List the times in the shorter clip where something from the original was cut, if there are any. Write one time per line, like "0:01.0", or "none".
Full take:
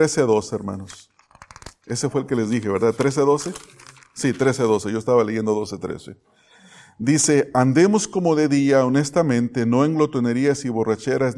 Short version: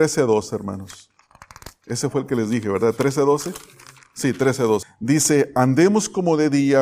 0:04.8